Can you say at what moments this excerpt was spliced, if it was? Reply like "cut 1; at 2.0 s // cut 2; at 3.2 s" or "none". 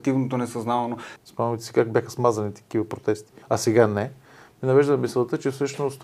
cut 1; at 1.2 s // cut 2; at 3.4 s